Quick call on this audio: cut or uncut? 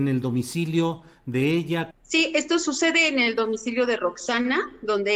cut